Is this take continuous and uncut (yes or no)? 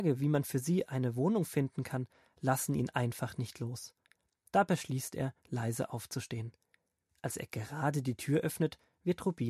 yes